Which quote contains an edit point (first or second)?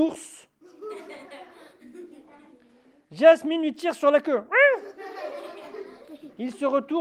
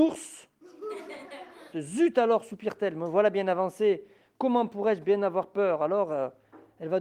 second